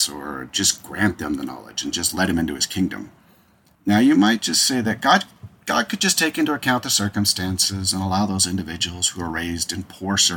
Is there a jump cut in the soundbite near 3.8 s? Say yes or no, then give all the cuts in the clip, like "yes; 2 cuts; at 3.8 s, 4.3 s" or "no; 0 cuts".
yes; 1 cut; at 3.8 s